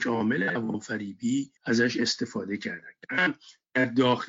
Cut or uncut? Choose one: cut